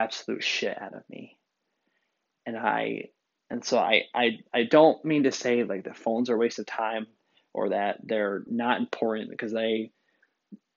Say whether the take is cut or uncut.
uncut